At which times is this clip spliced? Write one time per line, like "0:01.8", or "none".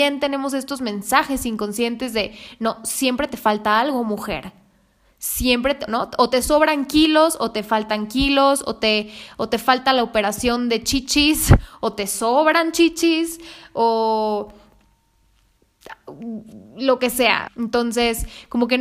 0:05.9
0:17.5